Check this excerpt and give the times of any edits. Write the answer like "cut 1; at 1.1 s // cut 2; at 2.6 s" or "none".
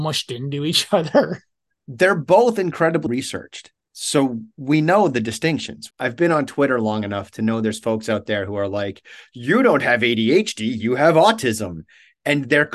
cut 1; at 3.1 s // cut 2; at 5.9 s